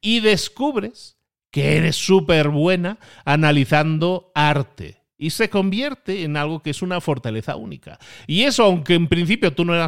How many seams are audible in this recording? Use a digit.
0